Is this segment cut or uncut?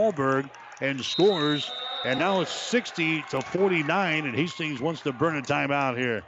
uncut